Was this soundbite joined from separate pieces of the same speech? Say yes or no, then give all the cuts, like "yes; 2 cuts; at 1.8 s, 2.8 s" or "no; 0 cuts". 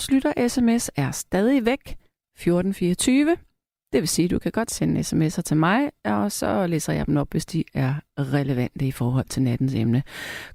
no; 0 cuts